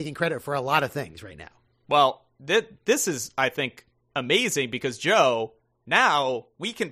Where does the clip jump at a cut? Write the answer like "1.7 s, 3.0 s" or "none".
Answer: none